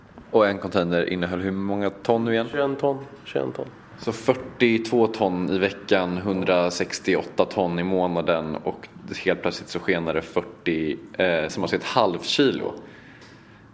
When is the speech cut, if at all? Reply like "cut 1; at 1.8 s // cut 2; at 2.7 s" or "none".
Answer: cut 1; at 11.5 s